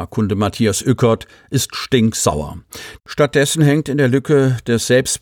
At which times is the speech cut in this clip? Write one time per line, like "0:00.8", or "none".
0:03.0